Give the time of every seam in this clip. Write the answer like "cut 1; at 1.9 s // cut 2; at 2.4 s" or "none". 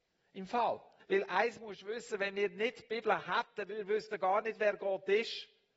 cut 1; at 1.0 s